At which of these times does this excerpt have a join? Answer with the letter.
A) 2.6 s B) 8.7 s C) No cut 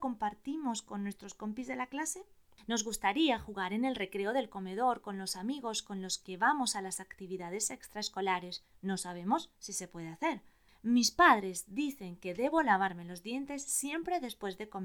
B